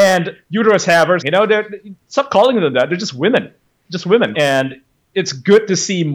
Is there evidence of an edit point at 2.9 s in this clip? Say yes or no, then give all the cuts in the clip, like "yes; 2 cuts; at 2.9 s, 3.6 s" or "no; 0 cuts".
no; 2 cuts; at 1.2 s, 4.3 s